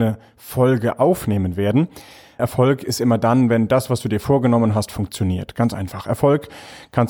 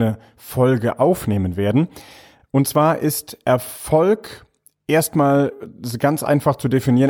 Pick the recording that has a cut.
first; 1 cut; at 2.4 s

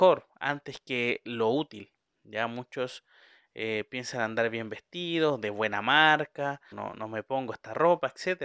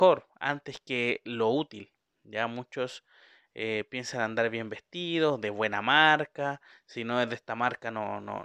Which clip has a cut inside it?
first; 1 cut; at 6.7 s

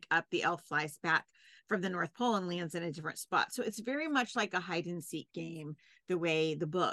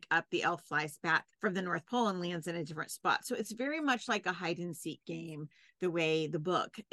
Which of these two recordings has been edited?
second; 1 cut; at 1.3 s

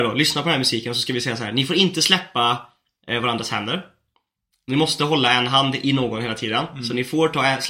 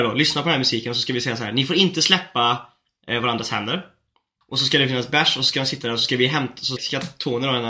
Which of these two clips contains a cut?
second; 2 cuts; at 4.4 s, 6.8 s

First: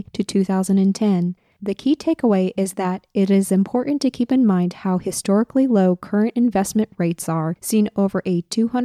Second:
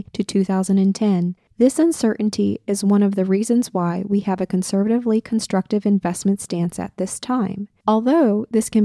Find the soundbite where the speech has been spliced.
second; 2 cuts; at 1.5 s, 7.8 s

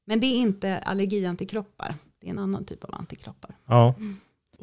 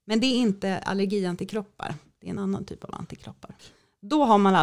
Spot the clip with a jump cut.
second; 1 cut; at 3.6 s

